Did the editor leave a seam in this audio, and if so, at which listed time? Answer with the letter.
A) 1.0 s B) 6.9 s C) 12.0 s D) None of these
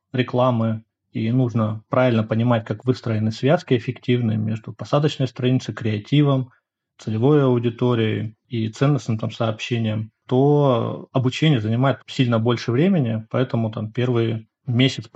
C